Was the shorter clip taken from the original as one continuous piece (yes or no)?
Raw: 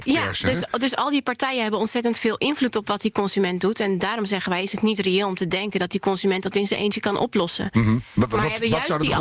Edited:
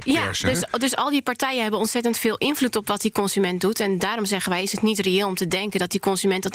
yes